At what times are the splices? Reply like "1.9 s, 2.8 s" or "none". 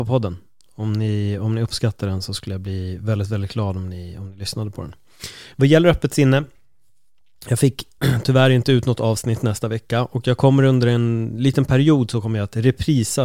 none